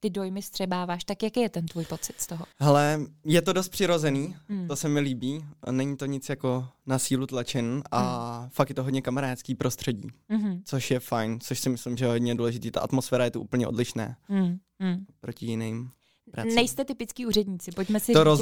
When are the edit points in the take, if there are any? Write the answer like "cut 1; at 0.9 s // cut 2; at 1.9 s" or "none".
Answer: cut 1; at 2.5 s